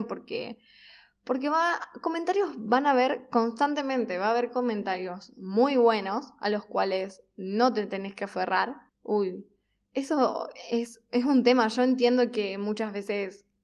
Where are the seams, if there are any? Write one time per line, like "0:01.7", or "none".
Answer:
0:08.9